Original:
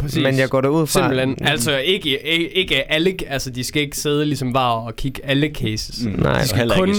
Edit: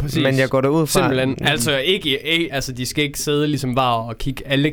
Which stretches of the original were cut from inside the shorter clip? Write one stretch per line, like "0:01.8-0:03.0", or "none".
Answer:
0:02.5-0:03.3

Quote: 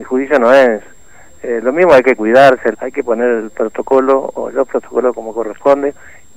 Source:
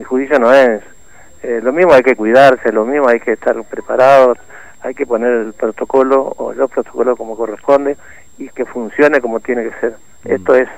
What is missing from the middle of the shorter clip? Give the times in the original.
0:02.7-0:04.7

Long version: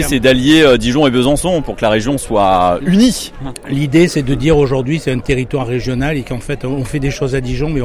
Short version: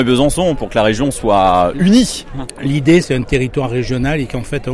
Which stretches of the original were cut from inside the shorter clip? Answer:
0:04.1-0:05.0

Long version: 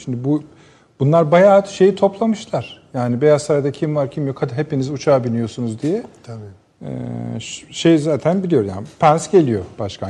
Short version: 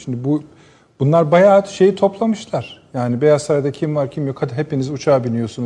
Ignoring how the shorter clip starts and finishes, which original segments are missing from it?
none

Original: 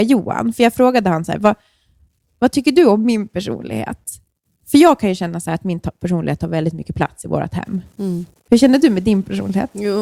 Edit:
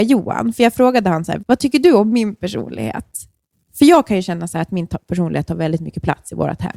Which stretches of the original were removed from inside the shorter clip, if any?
0:01.4-0:02.3

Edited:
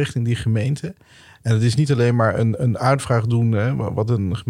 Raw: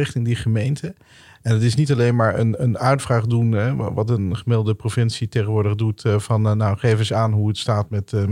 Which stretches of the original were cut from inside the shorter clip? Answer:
none

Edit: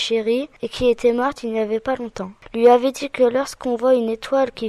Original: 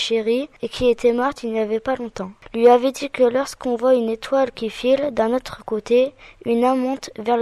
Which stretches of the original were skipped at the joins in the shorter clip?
none

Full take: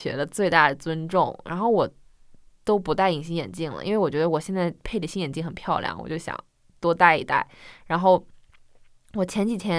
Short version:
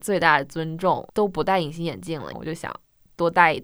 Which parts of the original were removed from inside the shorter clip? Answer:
0:01.4-0:02.6
0:03.8-0:06.0

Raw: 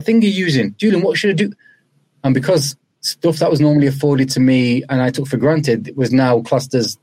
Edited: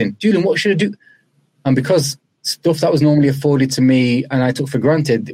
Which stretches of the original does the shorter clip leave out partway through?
none

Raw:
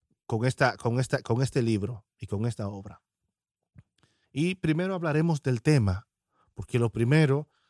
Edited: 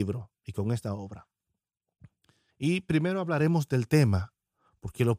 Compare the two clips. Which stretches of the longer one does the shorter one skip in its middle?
none

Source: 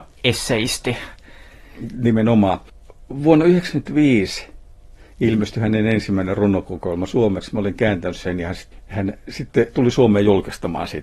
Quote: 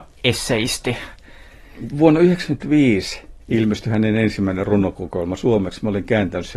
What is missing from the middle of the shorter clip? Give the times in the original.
0:01.9-0:03.2
0:04.7-0:05.1

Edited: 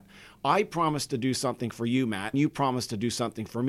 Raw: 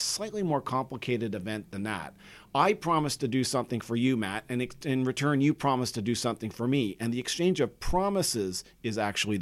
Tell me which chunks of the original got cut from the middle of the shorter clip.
0:04.4-0:05.4

